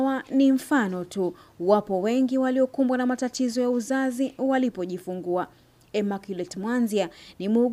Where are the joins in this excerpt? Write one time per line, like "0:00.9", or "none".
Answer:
none